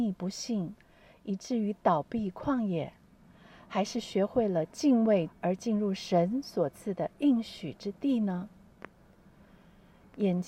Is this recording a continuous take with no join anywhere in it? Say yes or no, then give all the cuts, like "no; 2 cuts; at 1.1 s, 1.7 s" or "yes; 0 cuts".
no; 1 cut; at 5.3 s